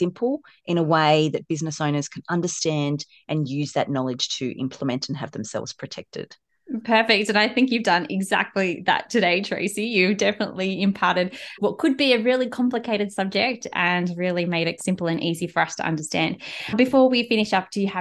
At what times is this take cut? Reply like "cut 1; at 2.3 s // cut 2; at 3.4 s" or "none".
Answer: cut 1; at 14.8 s